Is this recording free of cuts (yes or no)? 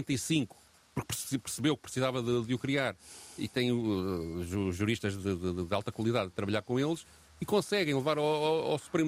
yes